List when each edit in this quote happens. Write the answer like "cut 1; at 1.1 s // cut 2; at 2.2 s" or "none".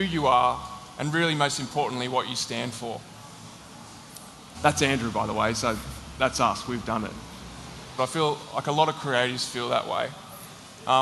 cut 1; at 4.5 s // cut 2; at 8.0 s